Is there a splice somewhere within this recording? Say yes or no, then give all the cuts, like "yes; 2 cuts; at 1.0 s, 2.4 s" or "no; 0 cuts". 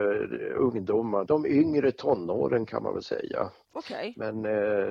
yes; 1 cut; at 1.3 s